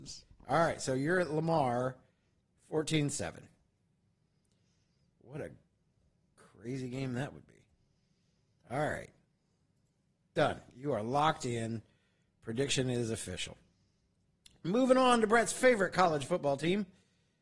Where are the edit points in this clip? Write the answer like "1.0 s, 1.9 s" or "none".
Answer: none